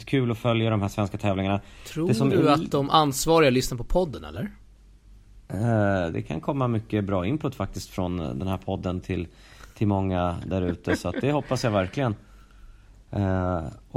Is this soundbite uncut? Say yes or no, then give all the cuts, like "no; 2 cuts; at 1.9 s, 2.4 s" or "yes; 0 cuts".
no; 1 cut; at 6.1 s